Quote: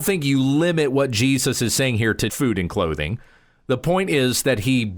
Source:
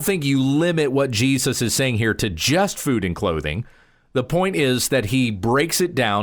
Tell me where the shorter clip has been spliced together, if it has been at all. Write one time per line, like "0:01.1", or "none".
0:02.3

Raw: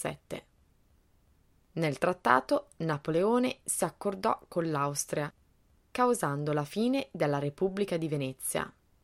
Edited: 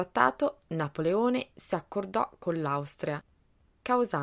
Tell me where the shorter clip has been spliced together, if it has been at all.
none

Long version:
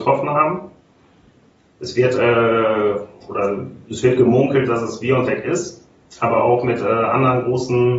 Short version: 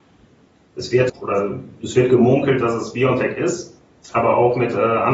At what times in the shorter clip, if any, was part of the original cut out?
0:01.1

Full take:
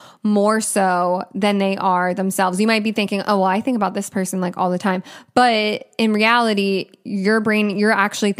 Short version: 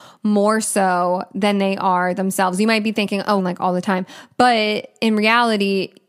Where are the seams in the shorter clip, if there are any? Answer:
0:03.4

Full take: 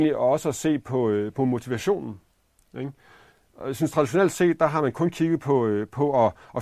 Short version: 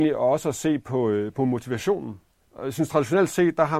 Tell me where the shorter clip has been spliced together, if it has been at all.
0:02.4

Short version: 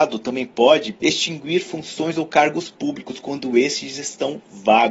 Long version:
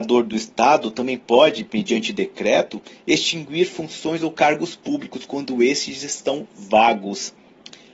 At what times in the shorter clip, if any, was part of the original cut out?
0:01.0

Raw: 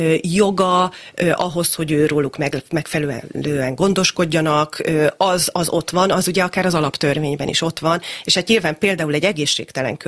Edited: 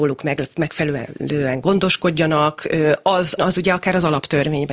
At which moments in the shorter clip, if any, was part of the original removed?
0:03.4

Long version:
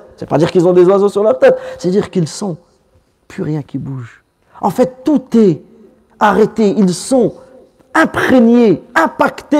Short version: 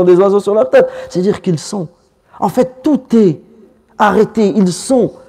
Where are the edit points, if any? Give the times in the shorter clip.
0:02.2

